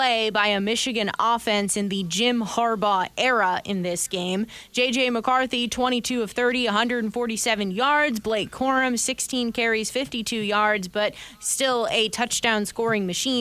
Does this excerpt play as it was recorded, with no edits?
yes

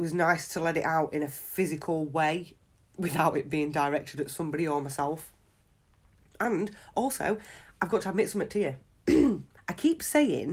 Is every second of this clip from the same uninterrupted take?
no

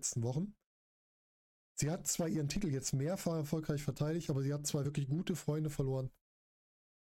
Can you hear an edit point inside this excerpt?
no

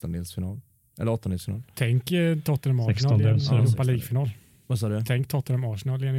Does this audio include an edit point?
no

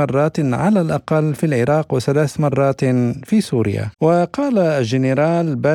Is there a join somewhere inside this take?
yes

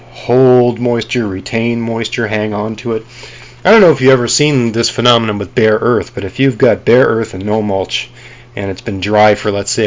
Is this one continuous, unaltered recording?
yes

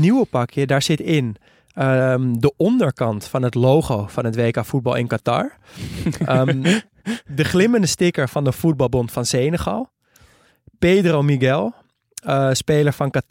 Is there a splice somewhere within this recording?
no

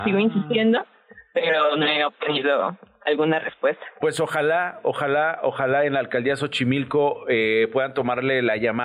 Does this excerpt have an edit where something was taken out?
no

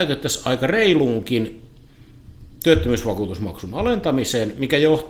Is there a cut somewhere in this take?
no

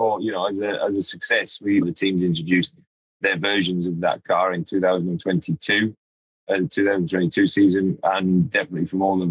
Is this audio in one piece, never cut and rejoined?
no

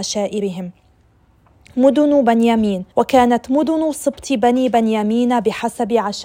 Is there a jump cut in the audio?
yes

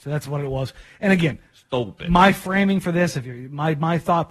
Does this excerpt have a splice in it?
no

